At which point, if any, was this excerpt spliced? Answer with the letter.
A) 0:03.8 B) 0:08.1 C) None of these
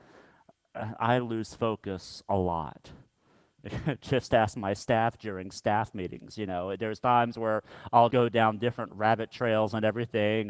B